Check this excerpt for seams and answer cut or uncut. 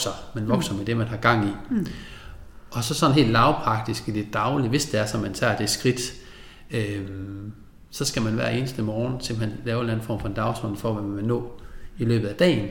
uncut